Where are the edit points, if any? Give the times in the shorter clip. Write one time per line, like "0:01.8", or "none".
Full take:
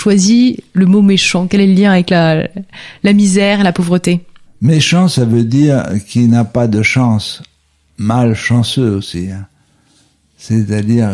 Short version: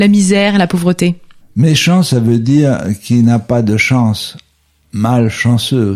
none